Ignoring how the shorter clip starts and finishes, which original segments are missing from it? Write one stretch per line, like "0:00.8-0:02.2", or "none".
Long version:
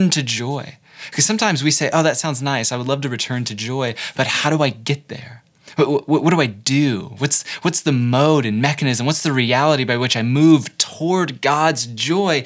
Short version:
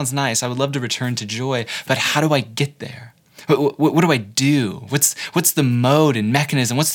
none